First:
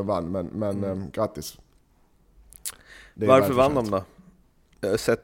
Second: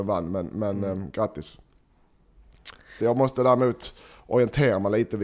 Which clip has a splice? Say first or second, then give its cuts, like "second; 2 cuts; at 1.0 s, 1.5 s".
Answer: second; 1 cut; at 3.0 s